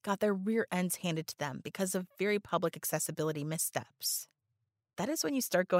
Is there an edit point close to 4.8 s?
yes; 1 cut; at 4.8 s

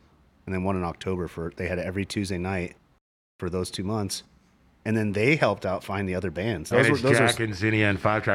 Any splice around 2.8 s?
no; 1 cut; at 6.7 s

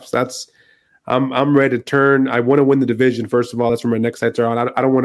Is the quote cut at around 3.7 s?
no; 0 cuts

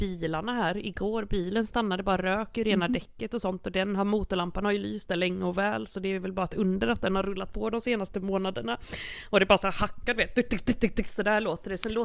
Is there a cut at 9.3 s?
no; 0 cuts

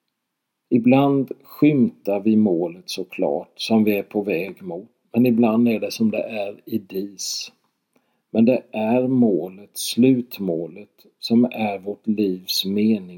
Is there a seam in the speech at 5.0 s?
yes; 1 cut; at 5.0 s

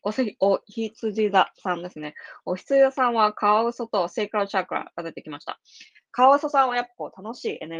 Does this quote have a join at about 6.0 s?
no; 0 cuts

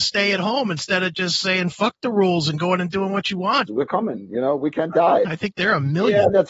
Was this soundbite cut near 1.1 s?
no; 2 cuts; at 3.7 s, 5.2 s

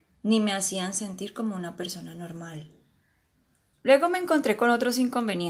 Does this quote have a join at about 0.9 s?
no; 1 cut; at 3.7 s

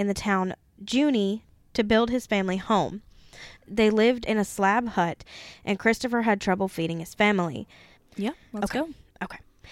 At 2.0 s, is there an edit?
no; 2 cuts; at 3.6 s, 8.0 s

